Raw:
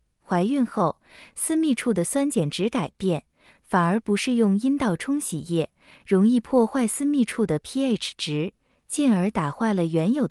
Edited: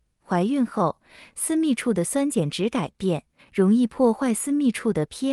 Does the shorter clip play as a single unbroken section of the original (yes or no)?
no